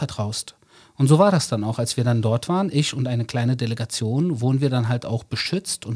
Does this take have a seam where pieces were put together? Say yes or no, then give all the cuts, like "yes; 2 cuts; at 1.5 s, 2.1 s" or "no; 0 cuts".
no; 0 cuts